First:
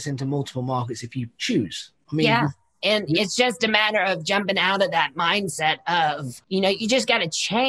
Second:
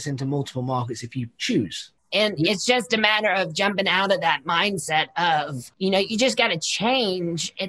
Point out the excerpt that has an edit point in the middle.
second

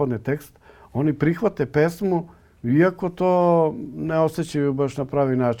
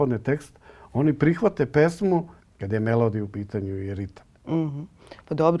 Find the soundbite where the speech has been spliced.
second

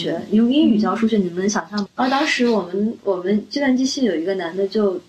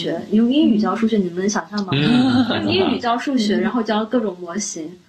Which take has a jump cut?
first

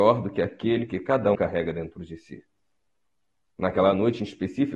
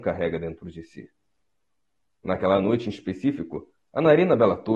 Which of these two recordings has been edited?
first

